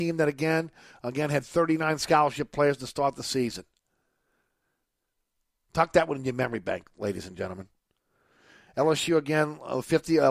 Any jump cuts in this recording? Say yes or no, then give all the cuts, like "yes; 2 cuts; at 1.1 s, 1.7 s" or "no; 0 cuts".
no; 0 cuts